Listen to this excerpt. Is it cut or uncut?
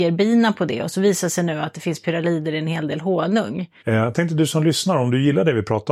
cut